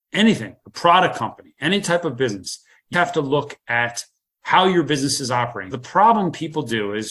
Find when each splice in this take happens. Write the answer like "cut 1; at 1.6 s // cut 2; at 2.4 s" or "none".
cut 1; at 2.9 s // cut 2; at 5.7 s